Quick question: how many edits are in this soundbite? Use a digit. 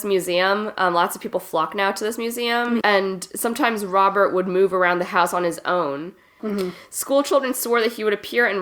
2